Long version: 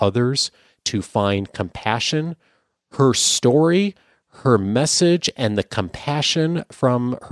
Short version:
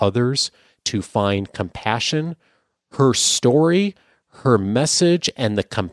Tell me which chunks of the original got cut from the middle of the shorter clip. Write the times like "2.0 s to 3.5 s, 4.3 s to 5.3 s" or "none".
none